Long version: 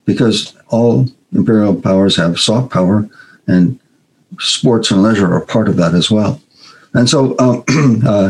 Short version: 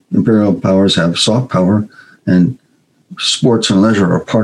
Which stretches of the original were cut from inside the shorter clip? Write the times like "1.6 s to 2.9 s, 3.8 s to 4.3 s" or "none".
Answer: none